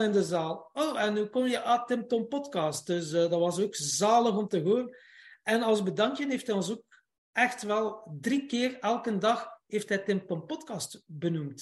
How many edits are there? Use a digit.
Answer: 0